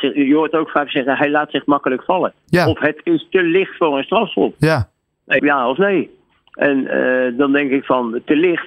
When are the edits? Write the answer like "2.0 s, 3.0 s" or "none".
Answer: 5.4 s

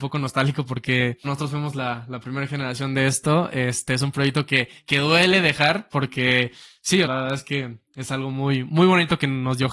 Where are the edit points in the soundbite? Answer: 1.2 s, 7.0 s

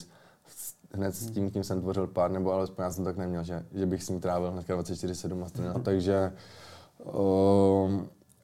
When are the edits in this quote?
5.7 s

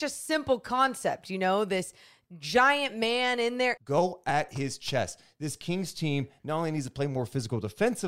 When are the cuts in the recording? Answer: 3.8 s

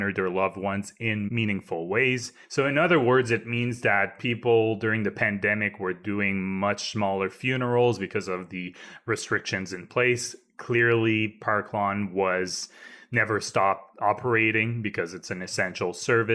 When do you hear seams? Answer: 2.4 s

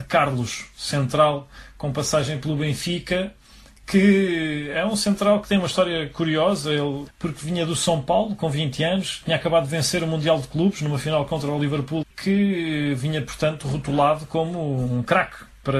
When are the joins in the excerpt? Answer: 7.1 s, 12.0 s

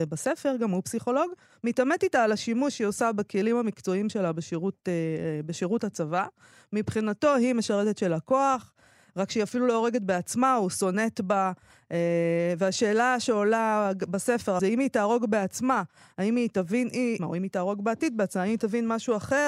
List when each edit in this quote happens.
14.6 s, 17.2 s

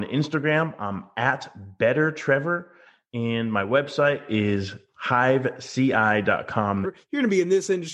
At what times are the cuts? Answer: 6.8 s

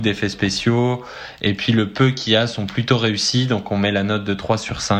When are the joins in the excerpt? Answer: none

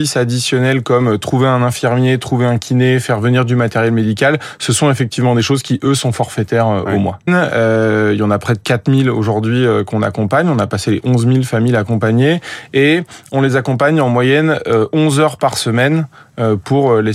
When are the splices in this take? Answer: 7.3 s

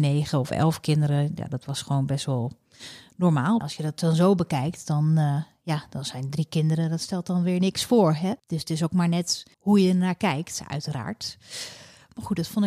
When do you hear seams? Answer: 9.5 s

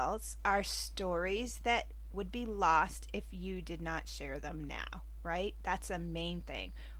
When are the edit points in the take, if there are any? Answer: none

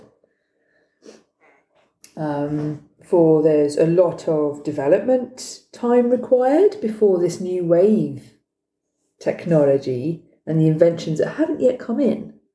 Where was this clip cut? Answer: none

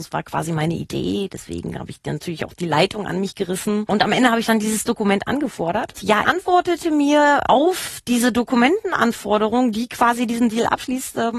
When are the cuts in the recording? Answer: 6.2 s

